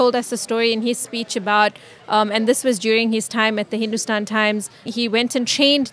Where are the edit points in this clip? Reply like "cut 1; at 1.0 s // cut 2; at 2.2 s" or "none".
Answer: cut 1; at 4.9 s